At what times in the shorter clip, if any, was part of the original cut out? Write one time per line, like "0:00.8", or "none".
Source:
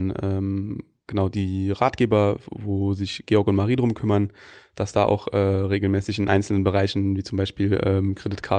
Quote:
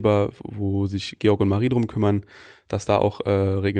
none